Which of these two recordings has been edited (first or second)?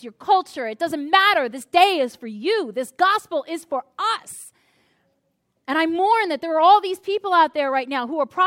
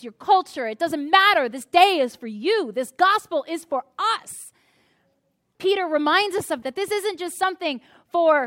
second